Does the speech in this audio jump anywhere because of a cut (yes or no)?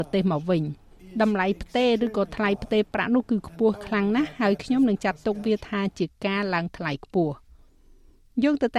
no